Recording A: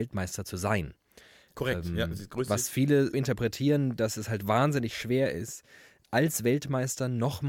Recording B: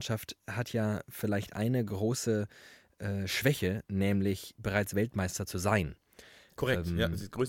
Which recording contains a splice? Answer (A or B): A